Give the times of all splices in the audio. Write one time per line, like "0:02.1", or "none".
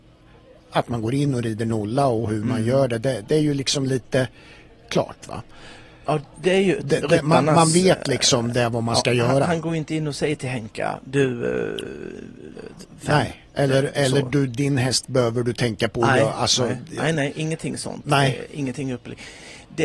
0:12.6